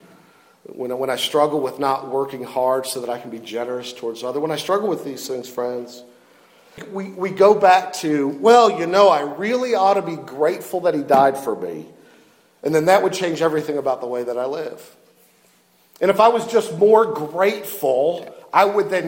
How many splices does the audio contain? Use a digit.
1